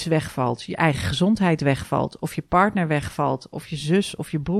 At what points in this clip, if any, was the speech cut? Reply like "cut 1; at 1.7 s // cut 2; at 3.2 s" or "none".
cut 1; at 3.5 s